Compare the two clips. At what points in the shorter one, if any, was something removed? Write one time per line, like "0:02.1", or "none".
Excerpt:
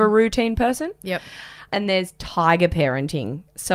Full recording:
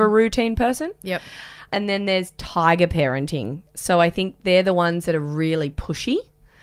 0:01.9